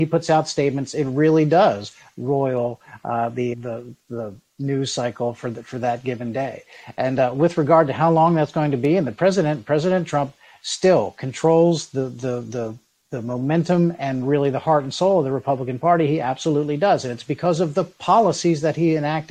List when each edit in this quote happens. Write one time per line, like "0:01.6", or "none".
0:03.5